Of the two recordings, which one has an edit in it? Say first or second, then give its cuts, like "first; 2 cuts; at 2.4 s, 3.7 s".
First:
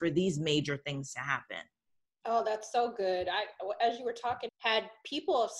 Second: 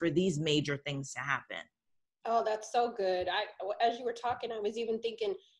first; 1 cut; at 4.5 s